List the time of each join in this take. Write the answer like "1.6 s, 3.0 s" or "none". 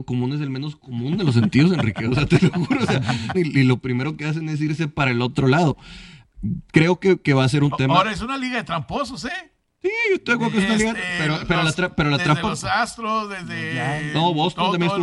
3.3 s